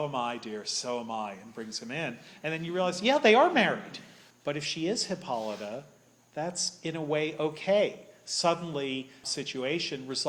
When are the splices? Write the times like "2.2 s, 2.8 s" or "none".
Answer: 4.3 s, 9.2 s